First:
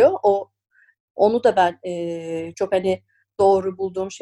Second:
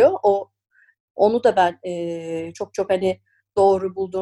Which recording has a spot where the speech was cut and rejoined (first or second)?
first